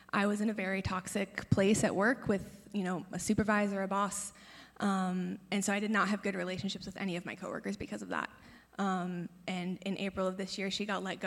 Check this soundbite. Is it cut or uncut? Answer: uncut